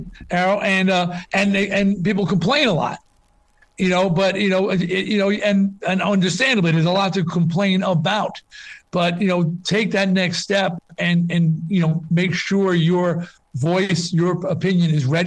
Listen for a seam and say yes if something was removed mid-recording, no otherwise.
no